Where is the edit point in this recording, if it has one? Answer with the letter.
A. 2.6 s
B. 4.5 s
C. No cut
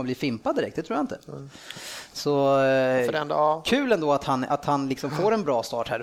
C